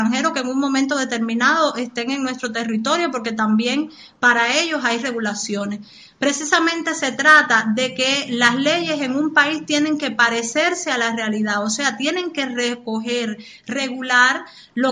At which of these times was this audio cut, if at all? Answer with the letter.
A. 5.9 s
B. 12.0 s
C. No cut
C